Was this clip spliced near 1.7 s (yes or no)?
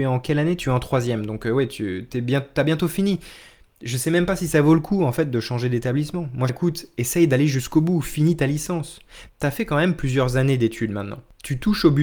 no